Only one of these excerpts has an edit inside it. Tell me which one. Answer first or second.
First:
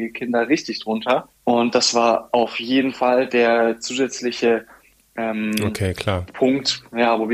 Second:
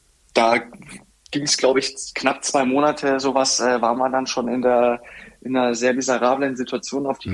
first